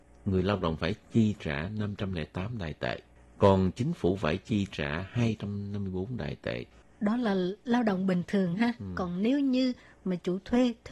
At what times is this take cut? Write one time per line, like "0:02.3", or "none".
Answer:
none